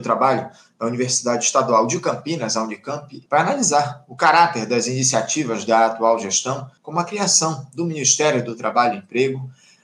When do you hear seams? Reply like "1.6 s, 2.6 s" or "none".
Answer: 3.3 s, 6.8 s